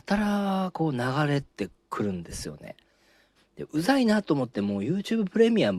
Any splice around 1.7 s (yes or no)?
no